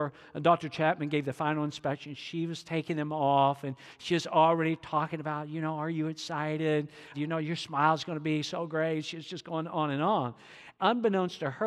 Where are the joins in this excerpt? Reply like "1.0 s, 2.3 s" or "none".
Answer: 7.1 s, 10.8 s